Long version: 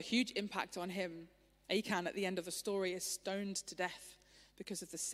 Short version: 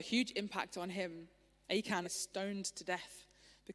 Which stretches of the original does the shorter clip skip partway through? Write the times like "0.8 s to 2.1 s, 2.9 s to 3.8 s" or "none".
2.0 s to 2.9 s

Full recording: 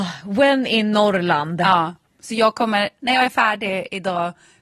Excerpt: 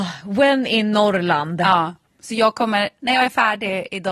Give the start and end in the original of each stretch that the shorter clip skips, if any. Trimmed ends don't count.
none

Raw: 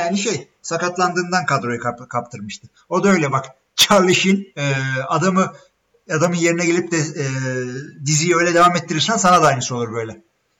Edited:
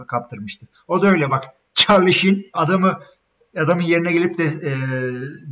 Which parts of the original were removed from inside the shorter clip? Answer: 4.5 s to 5.1 s

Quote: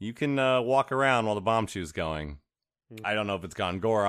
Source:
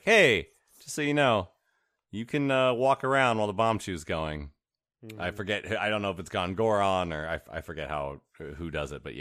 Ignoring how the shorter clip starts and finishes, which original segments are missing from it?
5.2 s to 5.8 s

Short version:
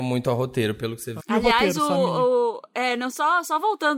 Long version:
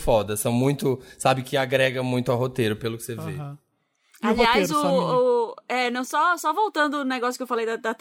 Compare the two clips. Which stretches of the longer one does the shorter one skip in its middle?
3.2 s to 4.1 s

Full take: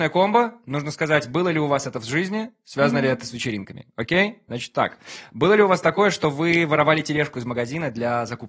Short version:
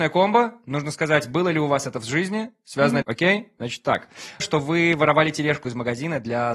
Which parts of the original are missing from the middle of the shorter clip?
3.0 s to 3.9 s, 5.3 s to 6.1 s

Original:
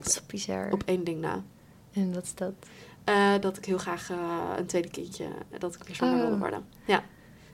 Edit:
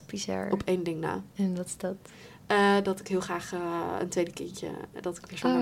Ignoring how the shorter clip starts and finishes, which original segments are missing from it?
1.5 s to 1.9 s

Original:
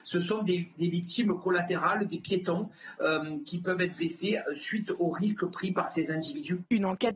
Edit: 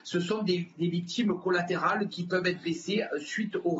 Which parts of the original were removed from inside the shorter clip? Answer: 2.1 s to 3.4 s

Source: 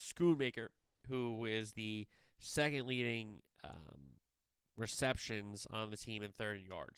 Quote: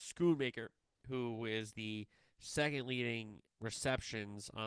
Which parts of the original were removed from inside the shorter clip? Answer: 3.5 s to 4.7 s

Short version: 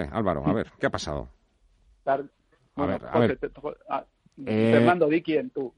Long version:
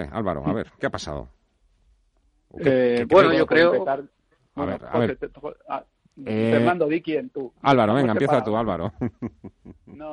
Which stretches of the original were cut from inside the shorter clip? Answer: 2.1 s to 3.9 s

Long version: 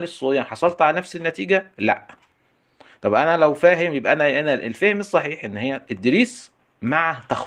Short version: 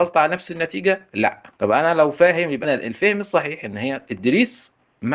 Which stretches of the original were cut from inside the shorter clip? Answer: 2.2 s to 3.0 s, 4.0 s to 4.4 s

